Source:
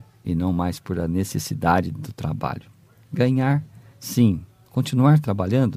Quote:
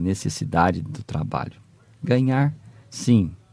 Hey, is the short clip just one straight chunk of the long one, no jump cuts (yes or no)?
yes